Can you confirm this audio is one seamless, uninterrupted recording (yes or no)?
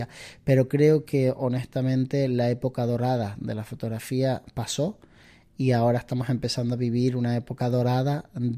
yes